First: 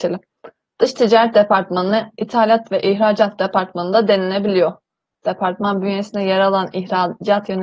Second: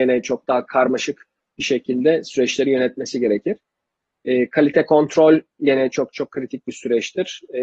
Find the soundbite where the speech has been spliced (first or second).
first